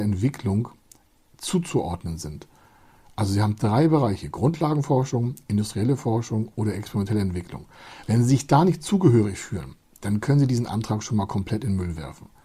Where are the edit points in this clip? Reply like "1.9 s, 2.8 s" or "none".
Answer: none

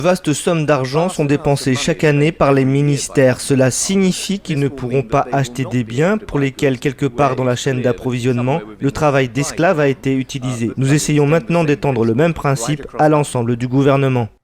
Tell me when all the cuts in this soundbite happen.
10.8 s

